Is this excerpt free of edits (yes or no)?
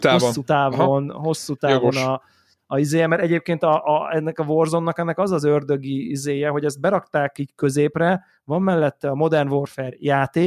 yes